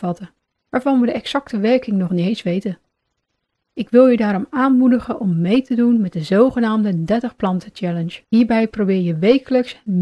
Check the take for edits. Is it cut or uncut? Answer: cut